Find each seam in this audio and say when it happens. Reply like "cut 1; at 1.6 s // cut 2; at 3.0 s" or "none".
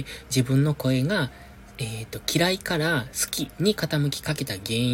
none